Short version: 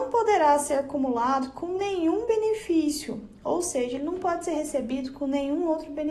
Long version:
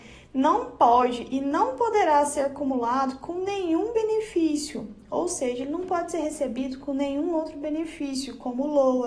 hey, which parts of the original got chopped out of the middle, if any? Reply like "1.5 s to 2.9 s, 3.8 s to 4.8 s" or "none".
none